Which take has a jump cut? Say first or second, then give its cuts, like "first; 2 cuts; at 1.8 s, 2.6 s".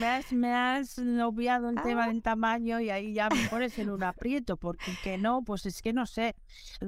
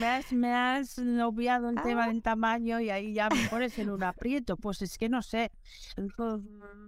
second; 1 cut; at 4.6 s